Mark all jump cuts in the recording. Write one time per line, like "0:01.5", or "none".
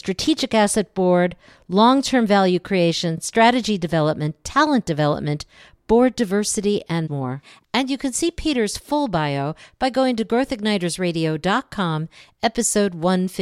none